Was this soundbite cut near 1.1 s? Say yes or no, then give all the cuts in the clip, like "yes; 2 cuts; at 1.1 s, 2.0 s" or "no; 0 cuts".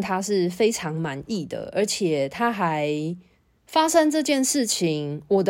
no; 1 cut; at 3.6 s